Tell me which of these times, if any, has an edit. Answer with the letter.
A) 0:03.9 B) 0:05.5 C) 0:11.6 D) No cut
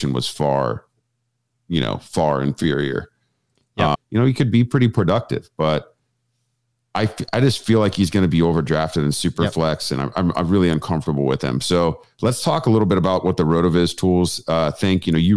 A